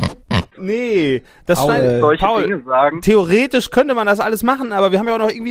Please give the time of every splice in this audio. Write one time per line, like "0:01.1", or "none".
none